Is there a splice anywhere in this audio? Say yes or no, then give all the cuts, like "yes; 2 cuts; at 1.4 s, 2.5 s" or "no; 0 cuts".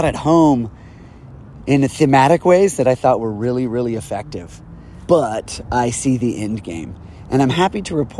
yes; 1 cut; at 5.1 s